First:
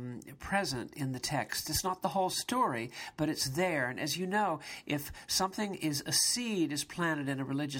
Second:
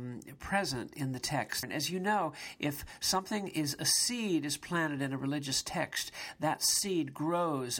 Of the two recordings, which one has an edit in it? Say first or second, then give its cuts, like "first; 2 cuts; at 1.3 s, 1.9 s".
second; 1 cut; at 1.6 s